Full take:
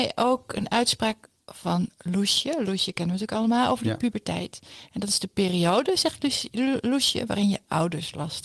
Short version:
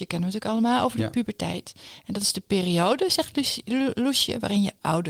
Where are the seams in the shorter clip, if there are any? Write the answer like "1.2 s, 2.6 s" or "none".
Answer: none

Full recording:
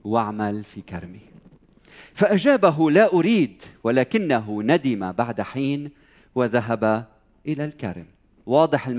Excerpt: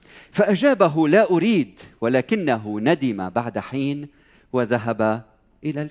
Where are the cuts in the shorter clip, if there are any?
none

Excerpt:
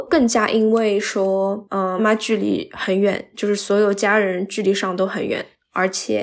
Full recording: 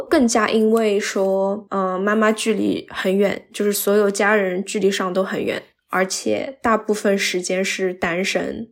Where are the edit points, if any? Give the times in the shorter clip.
2.0 s

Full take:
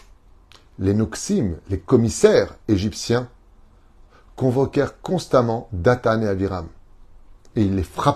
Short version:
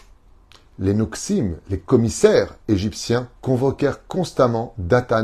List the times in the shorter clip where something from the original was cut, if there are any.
3.4 s

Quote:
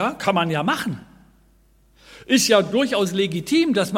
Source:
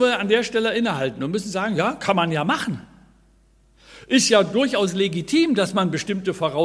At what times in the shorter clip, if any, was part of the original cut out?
none

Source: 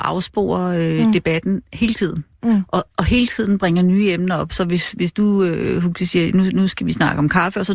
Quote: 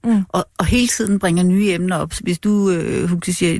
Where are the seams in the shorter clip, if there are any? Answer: 2.2 s

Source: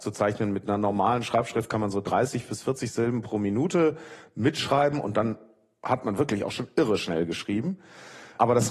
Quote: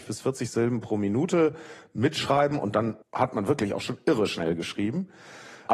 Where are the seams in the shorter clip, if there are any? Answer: 3.0 s

